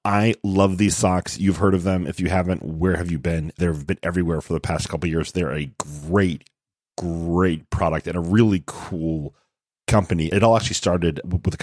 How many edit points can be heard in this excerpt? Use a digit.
0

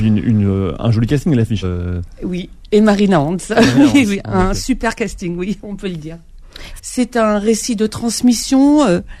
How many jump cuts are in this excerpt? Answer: 2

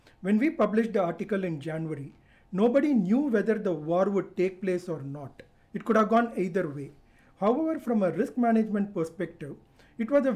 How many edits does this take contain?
0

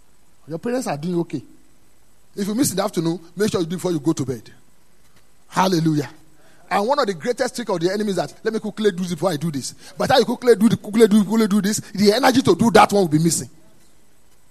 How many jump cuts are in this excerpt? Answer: 1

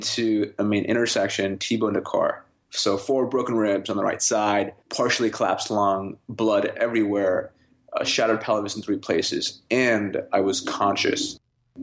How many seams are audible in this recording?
1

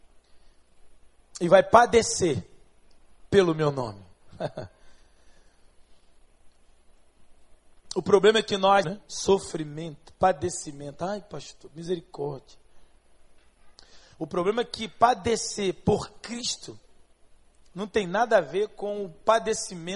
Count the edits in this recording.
1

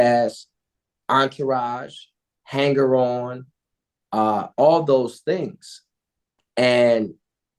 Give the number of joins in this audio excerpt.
0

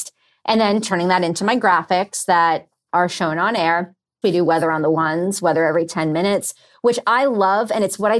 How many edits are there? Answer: 1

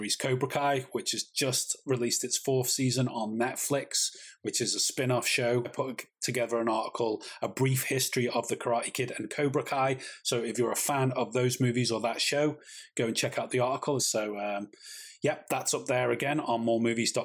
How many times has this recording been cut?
1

